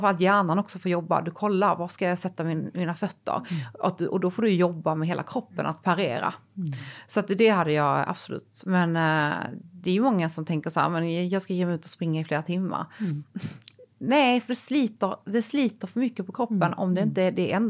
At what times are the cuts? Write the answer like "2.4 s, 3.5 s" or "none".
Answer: none